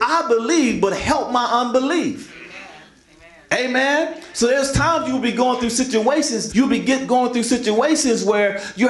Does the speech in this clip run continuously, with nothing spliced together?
no; 1 cut; at 6.5 s

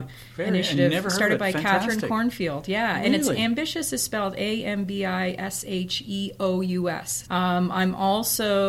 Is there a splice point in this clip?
yes; 1 cut; at 7.2 s

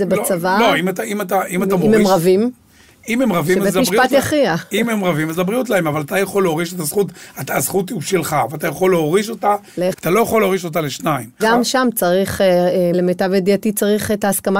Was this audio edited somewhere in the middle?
yes; 3 cuts; at 9.9 s, 11.4 s, 12.9 s

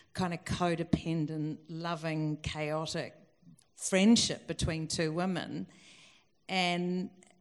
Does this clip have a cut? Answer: no; 0 cuts

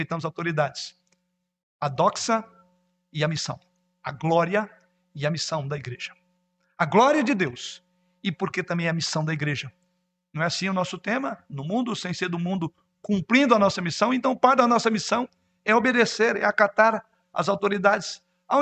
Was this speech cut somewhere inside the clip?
no; 0 cuts

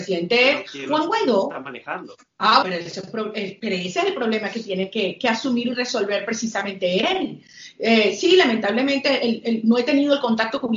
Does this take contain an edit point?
yes; 1 cut; at 2.6 s

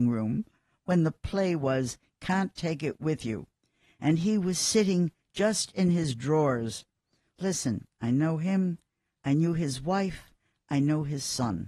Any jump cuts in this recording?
no; 0 cuts

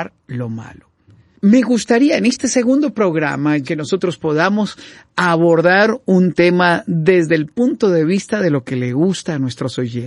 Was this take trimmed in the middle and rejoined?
yes; 1 cut; at 3.6 s

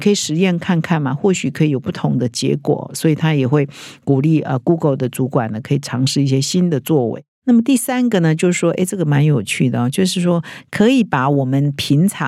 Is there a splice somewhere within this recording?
no; 0 cuts

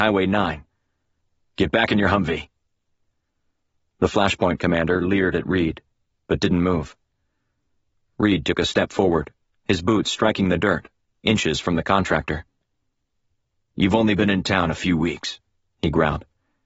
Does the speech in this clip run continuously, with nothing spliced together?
yes; 0 cuts

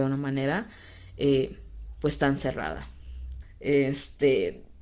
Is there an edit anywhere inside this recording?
yes; 1 cut; at 3.4 s

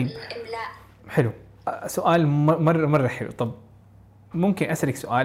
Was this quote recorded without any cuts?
no; 1 cut; at 4.3 s

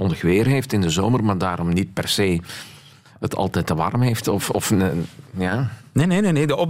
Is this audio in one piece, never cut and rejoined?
yes; 0 cuts

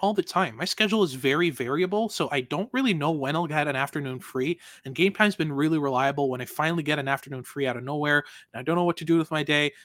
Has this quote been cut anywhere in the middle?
no; 0 cuts

